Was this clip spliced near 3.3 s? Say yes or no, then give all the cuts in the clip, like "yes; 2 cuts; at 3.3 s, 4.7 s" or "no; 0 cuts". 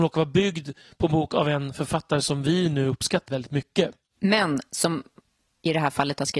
yes; 1 cut; at 3.3 s